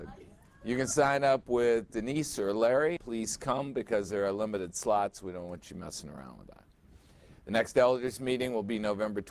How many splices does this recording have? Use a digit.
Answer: 1